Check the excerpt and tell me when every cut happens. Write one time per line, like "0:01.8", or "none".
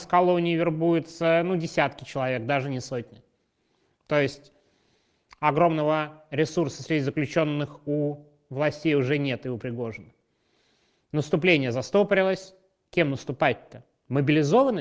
none